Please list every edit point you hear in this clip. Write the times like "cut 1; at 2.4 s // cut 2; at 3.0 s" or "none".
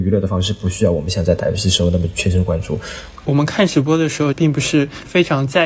cut 1; at 3.2 s // cut 2; at 4.3 s